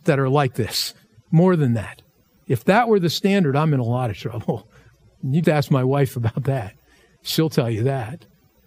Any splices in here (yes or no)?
yes